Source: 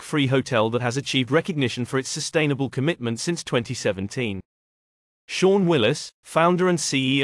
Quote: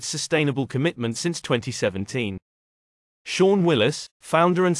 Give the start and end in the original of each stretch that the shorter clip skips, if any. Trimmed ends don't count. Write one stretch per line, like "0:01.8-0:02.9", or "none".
none